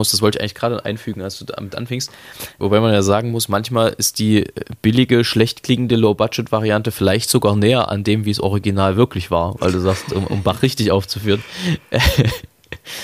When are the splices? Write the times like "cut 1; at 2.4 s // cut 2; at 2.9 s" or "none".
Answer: cut 1; at 2.6 s